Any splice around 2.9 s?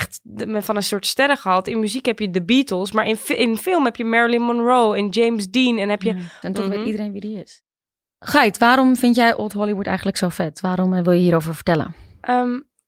no; 1 cut; at 6.4 s

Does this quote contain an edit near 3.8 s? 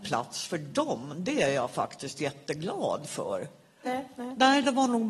yes; 1 cut; at 3.8 s

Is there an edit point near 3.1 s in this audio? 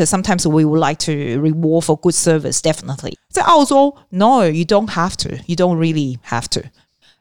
yes; 1 cut; at 3.1 s

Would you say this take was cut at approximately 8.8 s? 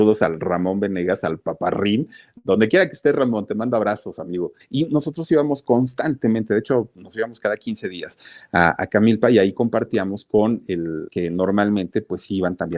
no; 2 cuts; at 4.6 s, 11.1 s

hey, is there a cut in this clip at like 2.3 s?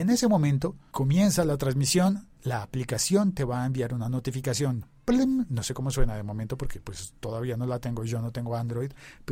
yes; 1 cut; at 2.3 s

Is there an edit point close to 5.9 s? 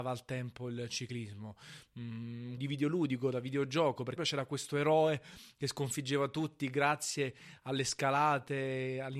no; 2 cuts; at 2.6 s, 4.2 s

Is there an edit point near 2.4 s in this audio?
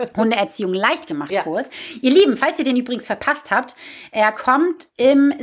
no; 0 cuts

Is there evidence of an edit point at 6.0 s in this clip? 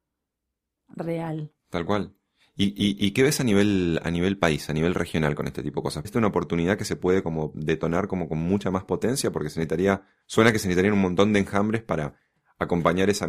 yes; 1 cut; at 6.0 s

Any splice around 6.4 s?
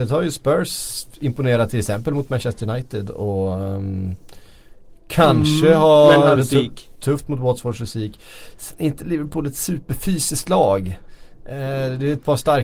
yes; 1 cut; at 6.4 s

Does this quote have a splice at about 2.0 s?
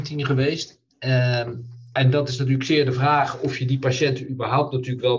yes; 1 cut; at 2.0 s

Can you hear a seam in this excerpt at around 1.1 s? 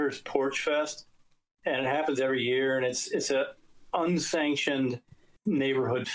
no; 0 cuts

